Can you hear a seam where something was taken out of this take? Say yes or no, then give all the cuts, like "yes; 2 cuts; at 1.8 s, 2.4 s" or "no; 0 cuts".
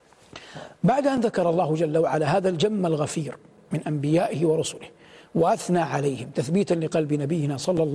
no; 0 cuts